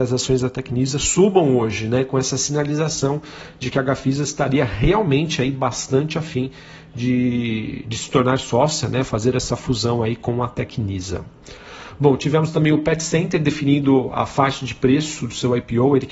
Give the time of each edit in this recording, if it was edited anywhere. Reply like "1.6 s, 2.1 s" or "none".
none